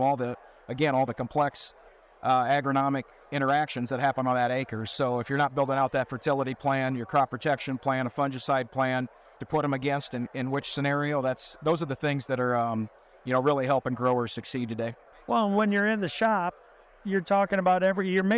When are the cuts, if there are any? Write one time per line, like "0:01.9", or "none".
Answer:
0:09.4
0:15.1

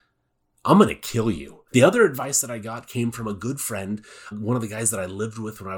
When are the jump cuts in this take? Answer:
0:01.7
0:04.3

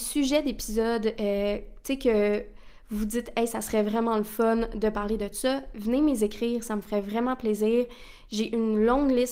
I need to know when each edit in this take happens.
none

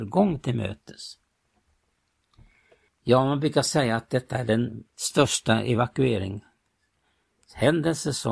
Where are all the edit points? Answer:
0:02.9
0:04.9

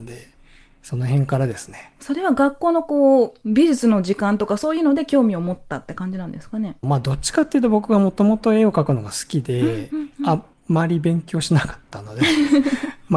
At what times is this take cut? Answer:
none

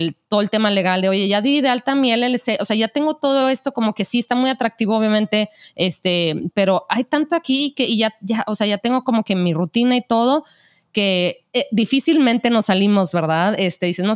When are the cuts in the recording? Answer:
0:06.5

